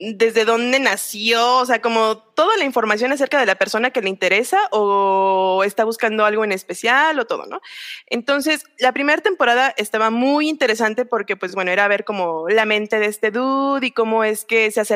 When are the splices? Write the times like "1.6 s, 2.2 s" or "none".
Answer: none